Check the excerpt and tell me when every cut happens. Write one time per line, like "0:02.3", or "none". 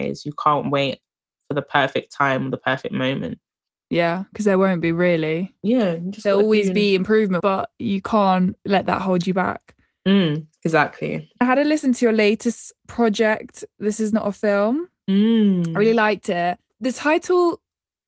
0:07.4
0:08.7
0:11.4